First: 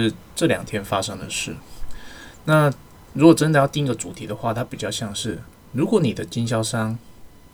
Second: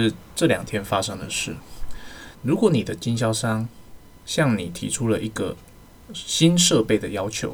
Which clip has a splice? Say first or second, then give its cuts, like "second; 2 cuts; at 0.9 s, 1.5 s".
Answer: second; 1 cut; at 2.3 s